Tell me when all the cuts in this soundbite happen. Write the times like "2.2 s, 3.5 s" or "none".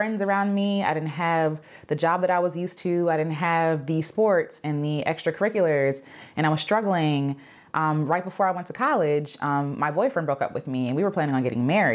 none